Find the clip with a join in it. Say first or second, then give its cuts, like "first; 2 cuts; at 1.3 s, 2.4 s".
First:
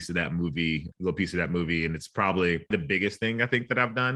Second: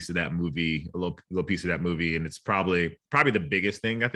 first; 2 cuts; at 0.9 s, 2.7 s